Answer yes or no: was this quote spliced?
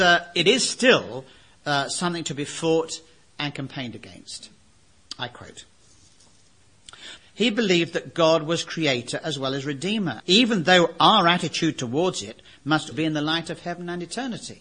yes